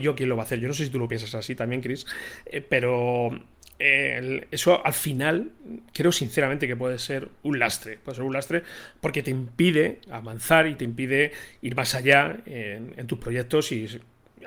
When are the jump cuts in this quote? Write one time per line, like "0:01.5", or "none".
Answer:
none